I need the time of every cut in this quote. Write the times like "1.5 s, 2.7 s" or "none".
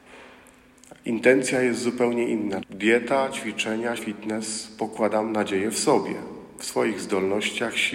2.6 s, 4.0 s